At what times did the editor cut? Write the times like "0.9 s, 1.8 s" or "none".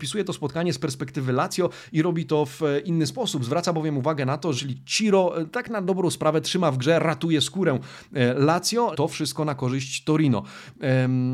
4.5 s, 8.9 s